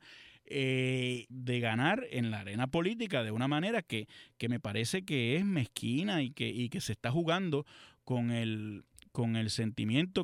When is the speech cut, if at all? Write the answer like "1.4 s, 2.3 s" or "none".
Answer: 1.3 s